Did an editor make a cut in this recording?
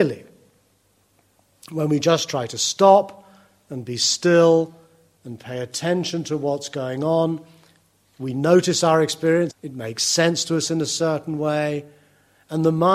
yes; 1 cut; at 9.5 s

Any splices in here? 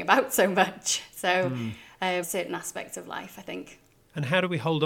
yes; 1 cut; at 2.2 s

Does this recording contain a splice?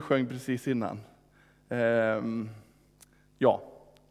no; 0 cuts

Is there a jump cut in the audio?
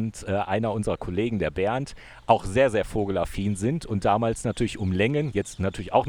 no; 0 cuts

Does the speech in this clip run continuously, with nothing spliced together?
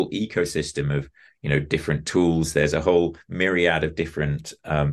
yes; 0 cuts

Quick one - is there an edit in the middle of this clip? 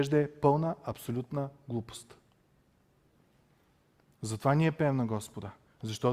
no; 0 cuts

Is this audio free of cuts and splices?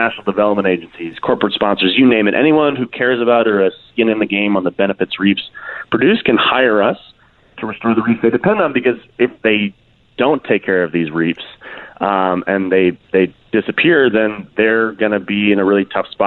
yes; 0 cuts

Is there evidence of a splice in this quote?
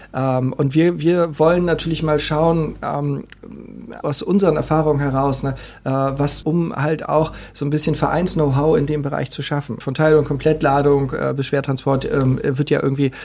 yes; 3 cuts; at 4.0 s, 6.4 s, 9.8 s

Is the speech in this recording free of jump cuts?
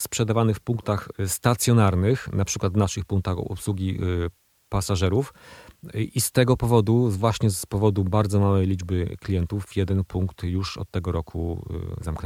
yes; 0 cuts

